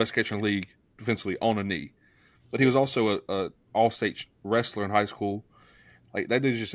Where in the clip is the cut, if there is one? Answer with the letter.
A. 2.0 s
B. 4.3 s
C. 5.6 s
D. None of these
D